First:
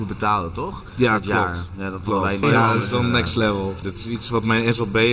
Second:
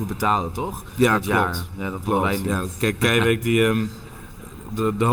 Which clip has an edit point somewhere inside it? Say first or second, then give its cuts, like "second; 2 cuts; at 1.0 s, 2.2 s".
first; 2 cuts; at 2.4 s, 3.8 s